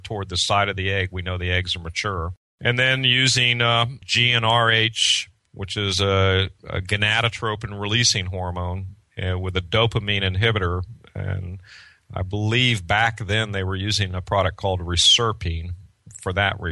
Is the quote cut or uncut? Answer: uncut